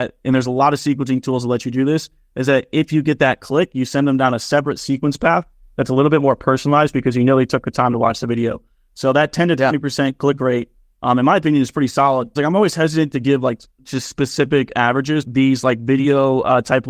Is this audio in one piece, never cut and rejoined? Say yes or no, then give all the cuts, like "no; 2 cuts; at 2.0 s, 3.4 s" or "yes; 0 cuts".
no; 2 cuts; at 12.4 s, 15.2 s